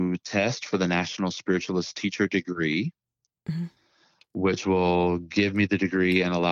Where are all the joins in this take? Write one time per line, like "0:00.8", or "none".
none